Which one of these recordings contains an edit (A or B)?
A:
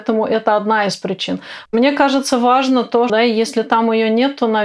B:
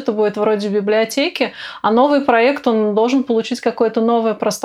A